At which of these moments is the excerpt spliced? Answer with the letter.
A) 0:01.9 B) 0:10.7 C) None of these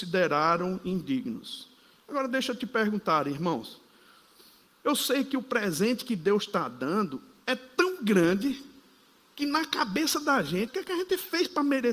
B